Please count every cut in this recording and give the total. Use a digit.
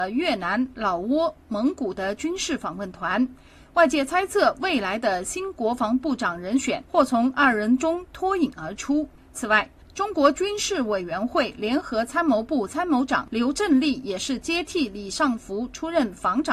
0